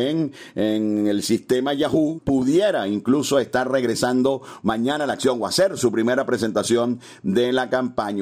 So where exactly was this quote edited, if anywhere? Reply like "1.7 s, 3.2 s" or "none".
2.2 s